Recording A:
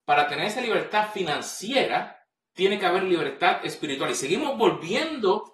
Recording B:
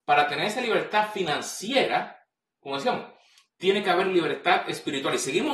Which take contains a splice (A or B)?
A